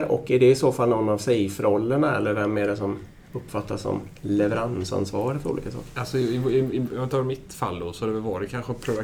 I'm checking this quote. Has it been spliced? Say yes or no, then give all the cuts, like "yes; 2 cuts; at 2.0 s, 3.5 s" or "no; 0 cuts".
no; 0 cuts